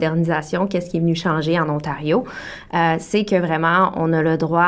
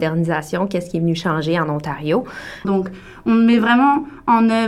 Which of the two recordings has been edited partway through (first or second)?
second